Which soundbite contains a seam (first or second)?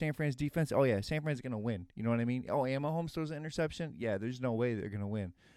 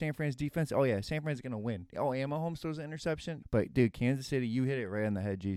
second